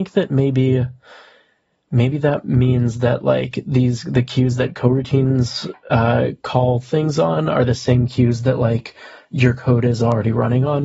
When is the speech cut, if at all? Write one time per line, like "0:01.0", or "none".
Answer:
none